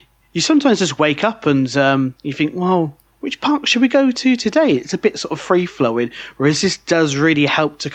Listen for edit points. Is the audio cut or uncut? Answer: uncut